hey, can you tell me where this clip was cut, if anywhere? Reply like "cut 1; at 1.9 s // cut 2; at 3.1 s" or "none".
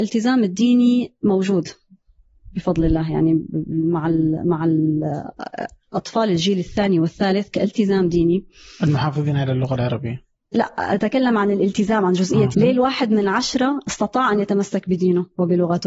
cut 1; at 12.5 s